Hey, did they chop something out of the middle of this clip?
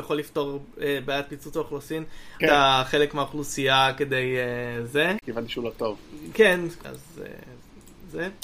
yes; 3 cuts; at 2.4 s, 5.2 s, 6.8 s

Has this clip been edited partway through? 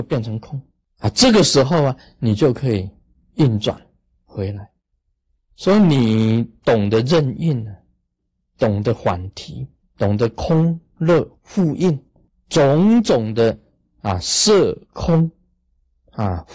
yes; 2 cuts; at 5.4 s, 9.8 s

